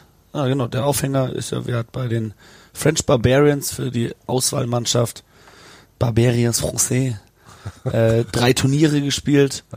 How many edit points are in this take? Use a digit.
0